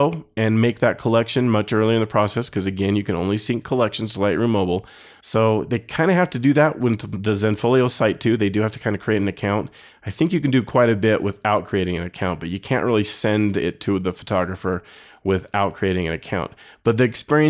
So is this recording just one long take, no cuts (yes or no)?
no